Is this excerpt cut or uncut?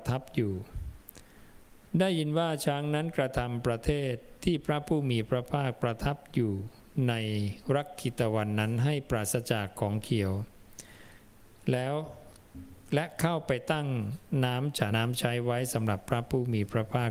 cut